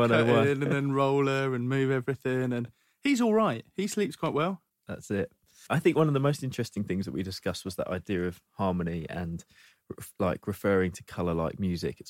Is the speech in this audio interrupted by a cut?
yes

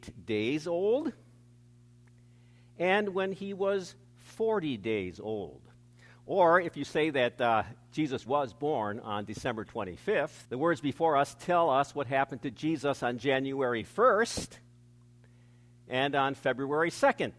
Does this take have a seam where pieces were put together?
yes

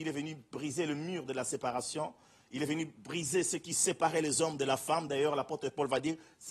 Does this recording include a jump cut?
no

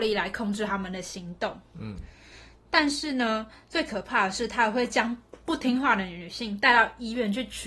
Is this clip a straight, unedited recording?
yes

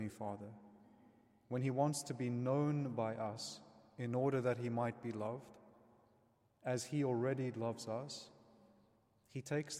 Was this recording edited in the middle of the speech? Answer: no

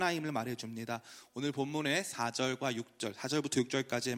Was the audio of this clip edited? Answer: no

